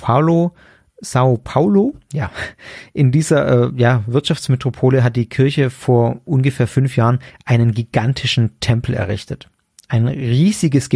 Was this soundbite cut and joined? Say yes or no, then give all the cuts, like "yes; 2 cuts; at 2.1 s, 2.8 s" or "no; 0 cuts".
no; 0 cuts